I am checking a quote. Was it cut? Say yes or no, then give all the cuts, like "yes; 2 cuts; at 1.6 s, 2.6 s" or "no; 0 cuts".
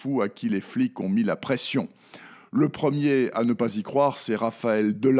no; 0 cuts